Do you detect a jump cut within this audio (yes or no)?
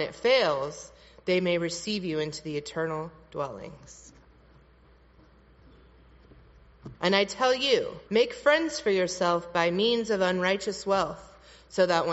yes